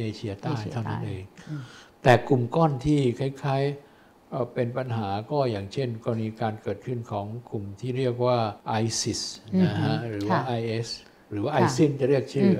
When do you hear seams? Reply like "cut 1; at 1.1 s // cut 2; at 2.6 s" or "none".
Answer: cut 1; at 8.6 s

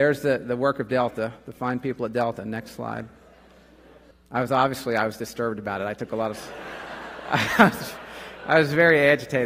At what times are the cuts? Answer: cut 1; at 4.1 s

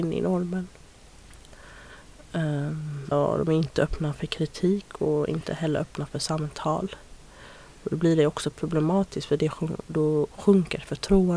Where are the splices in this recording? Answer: cut 1; at 3.1 s

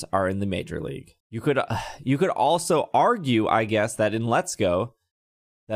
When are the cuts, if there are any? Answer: cut 1; at 1.2 s

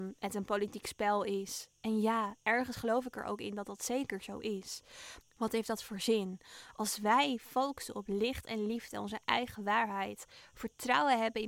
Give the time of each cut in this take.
cut 1; at 5.2 s

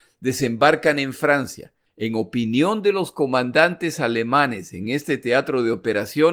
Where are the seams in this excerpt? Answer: cut 1; at 1.9 s

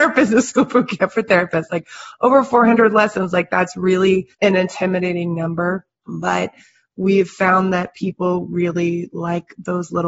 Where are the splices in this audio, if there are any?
cut 1; at 4.3 s

